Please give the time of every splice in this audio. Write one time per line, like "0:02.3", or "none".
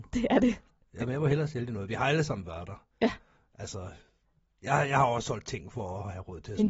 none